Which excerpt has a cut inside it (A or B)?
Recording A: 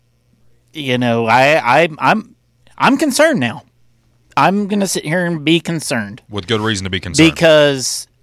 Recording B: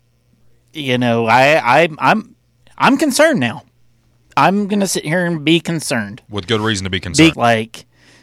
B